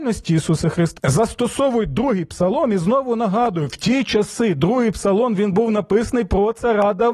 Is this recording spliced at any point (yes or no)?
yes